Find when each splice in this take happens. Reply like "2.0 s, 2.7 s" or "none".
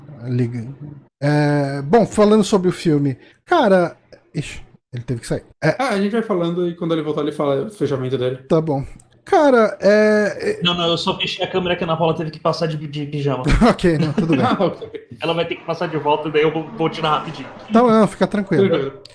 1.1 s, 5.5 s

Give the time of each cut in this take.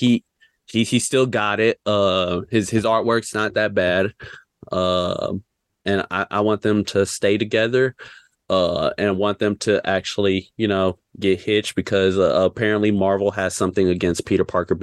4.6 s

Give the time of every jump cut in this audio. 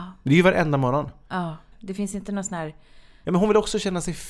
1.7 s, 3.2 s

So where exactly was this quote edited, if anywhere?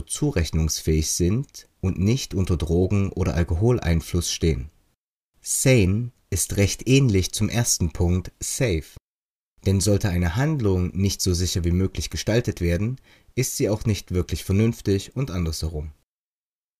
none

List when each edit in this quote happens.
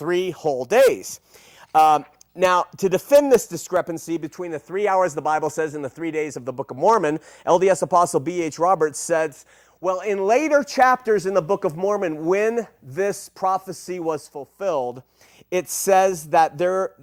none

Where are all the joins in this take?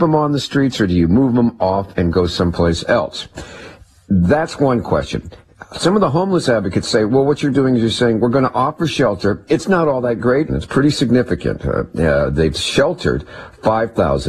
7.5 s, 10.5 s

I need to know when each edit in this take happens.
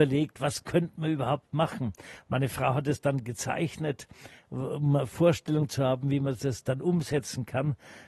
none

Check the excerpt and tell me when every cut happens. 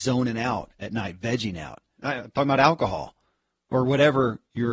2.0 s

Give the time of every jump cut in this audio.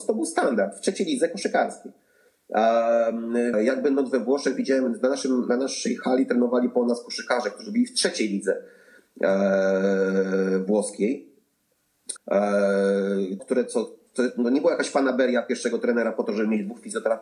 3.5 s, 12.2 s, 13.4 s

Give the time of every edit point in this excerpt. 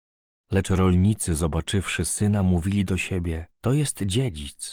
3.5 s

